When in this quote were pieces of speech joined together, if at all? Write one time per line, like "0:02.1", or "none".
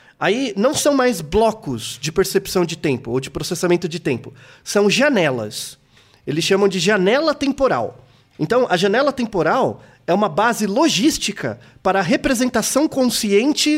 none